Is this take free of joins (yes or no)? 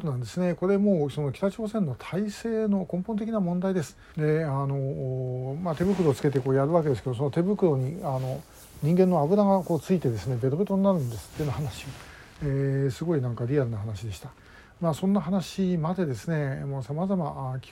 no